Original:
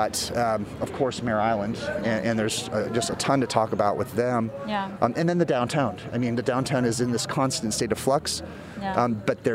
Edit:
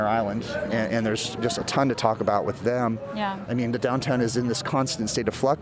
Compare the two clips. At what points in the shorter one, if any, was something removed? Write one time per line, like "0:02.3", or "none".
0:01.4
0:03.5